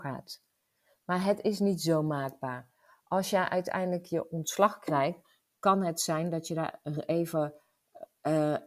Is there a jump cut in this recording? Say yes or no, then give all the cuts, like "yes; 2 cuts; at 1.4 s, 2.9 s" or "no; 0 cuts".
no; 0 cuts